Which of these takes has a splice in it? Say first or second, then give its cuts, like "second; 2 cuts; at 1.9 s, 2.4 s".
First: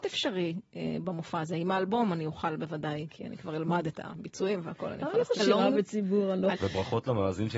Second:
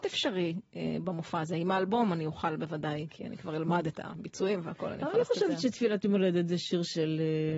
first; 2 cuts; at 5.4 s, 6.5 s